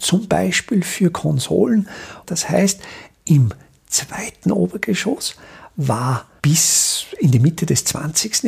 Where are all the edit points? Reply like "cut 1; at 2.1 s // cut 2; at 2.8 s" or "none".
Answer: cut 1; at 2.2 s